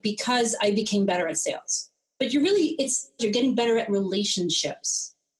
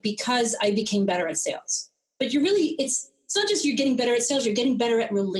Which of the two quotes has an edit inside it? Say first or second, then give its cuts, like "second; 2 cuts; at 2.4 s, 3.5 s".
first; 1 cut; at 3.2 s